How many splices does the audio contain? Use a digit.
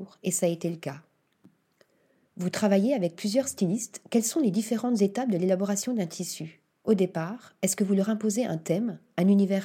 0